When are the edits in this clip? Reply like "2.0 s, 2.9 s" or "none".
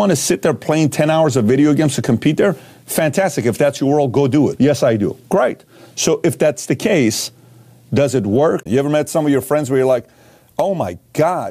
4.6 s, 8.7 s